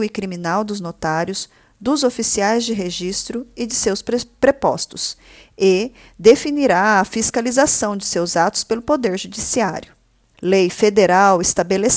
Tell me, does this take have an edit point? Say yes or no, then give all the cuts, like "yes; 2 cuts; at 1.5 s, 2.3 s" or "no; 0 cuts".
yes; 1 cut; at 10.3 s